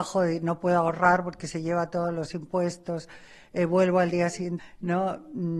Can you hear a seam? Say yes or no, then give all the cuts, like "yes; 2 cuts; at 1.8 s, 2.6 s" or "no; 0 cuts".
yes; 1 cut; at 4.6 s